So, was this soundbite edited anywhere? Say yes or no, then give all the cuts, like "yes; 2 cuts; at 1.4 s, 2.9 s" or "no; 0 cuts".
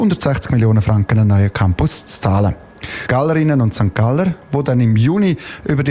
yes; 1 cut; at 3.1 s